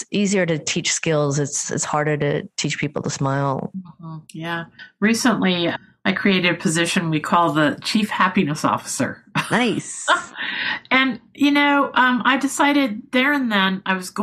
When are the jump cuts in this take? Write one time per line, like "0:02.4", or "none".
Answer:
0:04.2